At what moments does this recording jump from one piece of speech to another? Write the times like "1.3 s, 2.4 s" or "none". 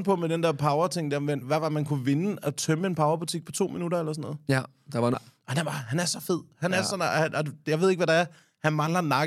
5.1 s